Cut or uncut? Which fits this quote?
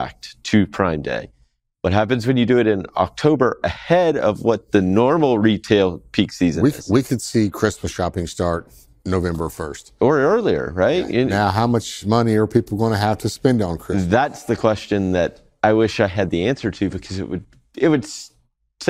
uncut